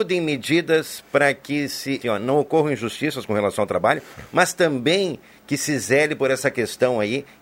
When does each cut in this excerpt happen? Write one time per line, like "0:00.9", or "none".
0:02.0